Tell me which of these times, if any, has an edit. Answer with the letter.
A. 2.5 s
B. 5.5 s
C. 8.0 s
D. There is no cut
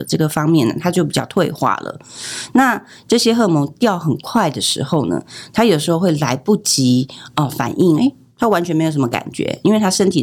C